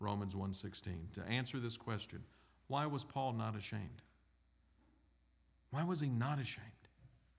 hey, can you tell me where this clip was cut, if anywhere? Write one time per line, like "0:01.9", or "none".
none